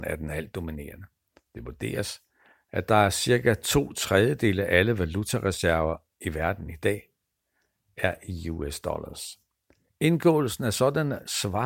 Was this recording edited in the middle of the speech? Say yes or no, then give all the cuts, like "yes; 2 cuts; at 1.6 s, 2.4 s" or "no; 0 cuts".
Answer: no; 0 cuts